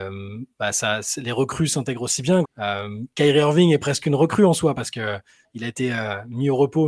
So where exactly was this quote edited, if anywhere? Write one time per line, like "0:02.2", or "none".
0:02.4